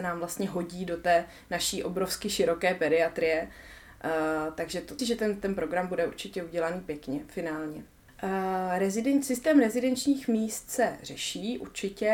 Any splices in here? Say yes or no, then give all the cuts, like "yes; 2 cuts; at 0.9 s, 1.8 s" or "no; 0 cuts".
yes; 2 cuts; at 5.0 s, 8.1 s